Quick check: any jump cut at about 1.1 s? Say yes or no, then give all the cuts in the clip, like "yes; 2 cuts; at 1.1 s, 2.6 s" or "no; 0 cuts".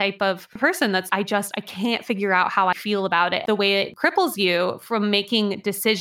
yes; 2 cuts; at 1.1 s, 2.7 s